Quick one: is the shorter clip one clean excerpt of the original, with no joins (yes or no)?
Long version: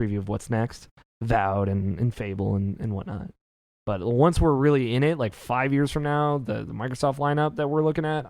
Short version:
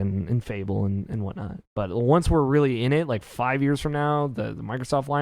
no